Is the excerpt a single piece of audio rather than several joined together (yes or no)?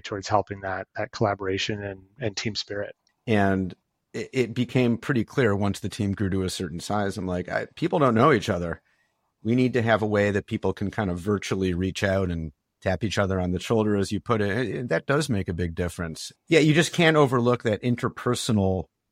no